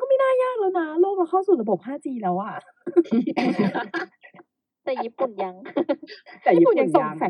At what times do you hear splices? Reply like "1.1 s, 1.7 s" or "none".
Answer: none

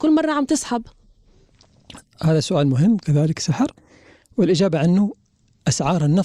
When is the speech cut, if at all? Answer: none

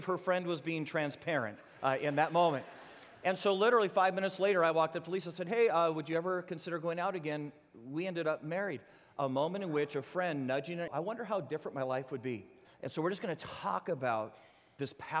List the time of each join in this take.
10.9 s, 12.7 s

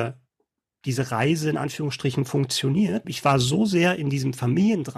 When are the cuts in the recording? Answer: 3.0 s

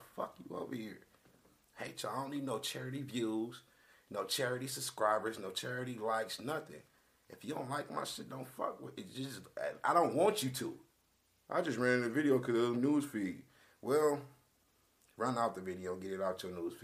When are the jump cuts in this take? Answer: 12.7 s

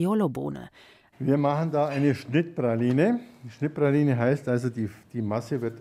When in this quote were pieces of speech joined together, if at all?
1.1 s

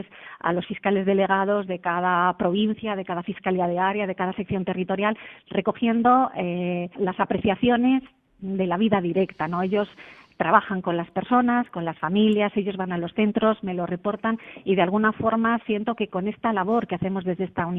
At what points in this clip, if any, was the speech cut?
7.0 s

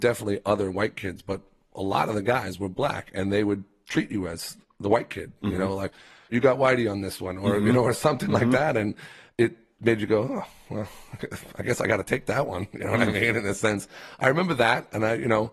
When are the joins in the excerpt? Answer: none

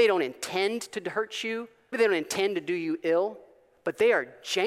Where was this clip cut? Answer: 1.9 s

